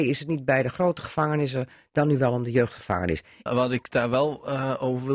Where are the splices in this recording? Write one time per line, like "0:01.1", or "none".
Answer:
0:03.5